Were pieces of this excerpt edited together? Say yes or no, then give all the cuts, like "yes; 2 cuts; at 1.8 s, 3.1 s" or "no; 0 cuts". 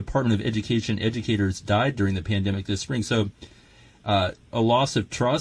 yes; 1 cut; at 4.5 s